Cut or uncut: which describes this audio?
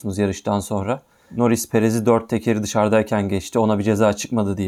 uncut